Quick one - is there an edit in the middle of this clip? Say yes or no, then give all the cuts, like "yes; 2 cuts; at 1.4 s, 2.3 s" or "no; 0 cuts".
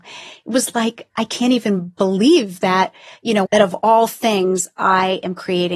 yes; 1 cut; at 3.5 s